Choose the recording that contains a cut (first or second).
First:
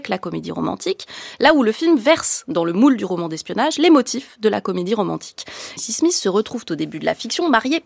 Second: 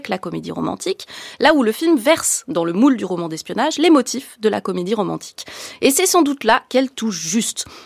first